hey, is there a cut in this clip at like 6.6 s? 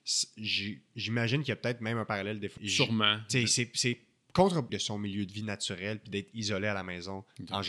no; 2 cuts; at 2.6 s, 4.7 s

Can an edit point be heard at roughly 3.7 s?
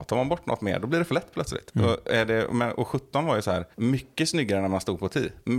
yes; 1 cut; at 3.7 s

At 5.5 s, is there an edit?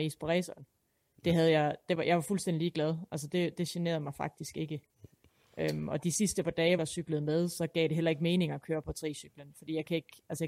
no; 1 cut; at 6.8 s

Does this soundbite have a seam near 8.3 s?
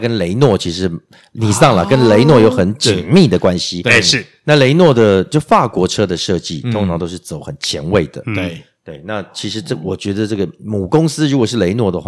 no; 0 cuts

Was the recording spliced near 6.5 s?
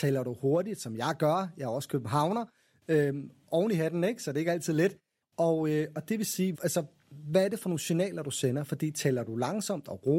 yes; 2 cuts; at 5.2 s, 6.5 s

